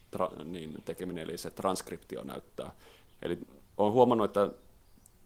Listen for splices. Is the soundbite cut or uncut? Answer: cut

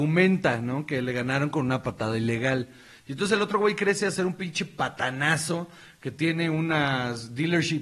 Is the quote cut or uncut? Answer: uncut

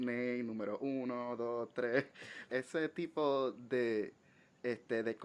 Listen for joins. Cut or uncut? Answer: cut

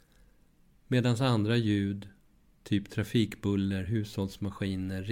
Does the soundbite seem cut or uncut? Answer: uncut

